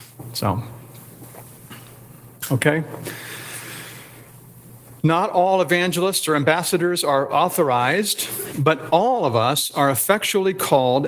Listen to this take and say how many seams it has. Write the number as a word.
one